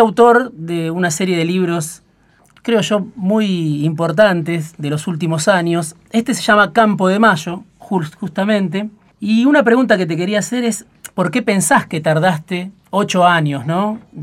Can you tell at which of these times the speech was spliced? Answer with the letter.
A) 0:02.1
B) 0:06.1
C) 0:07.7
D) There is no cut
D